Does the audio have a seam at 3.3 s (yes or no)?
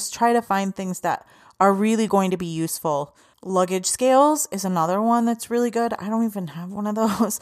no